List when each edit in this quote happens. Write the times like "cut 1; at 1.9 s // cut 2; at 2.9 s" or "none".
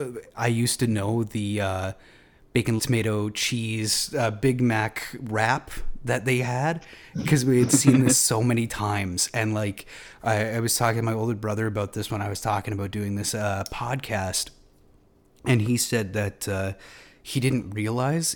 cut 1; at 2.8 s